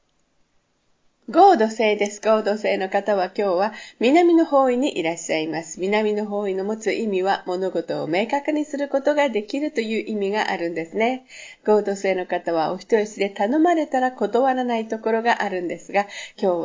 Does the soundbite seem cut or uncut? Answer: uncut